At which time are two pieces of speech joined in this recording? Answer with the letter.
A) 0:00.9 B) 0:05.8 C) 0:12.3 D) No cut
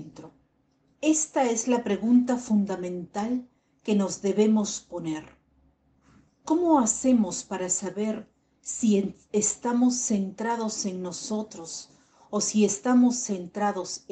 A